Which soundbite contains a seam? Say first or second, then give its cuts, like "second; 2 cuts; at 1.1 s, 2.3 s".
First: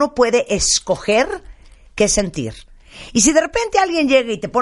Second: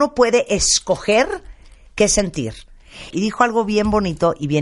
second; 1 cut; at 3.1 s